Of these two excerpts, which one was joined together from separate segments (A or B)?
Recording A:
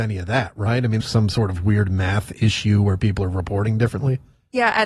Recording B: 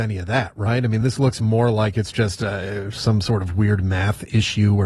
A